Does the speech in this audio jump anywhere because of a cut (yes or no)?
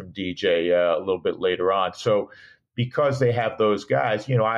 no